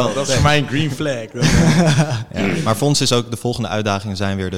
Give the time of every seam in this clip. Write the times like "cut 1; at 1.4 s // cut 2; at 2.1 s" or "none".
none